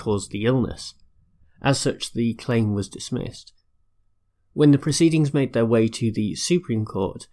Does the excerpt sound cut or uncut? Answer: uncut